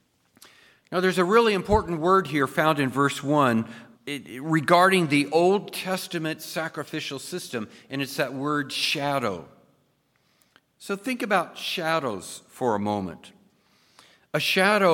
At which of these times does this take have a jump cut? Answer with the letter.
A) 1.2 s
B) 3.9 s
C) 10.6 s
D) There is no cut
B